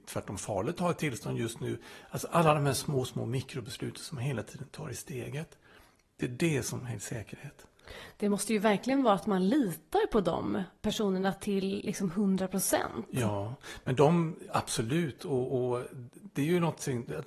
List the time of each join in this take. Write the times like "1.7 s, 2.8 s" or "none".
3.1 s